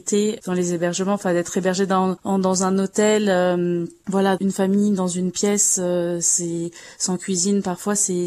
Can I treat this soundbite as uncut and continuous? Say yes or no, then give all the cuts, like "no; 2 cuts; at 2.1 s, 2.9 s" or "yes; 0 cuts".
no; 1 cut; at 4.4 s